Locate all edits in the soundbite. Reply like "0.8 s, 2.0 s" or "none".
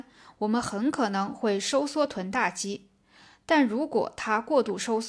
none